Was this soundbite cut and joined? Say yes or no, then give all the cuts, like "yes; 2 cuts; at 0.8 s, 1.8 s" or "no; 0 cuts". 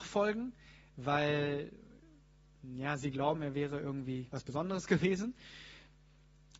no; 0 cuts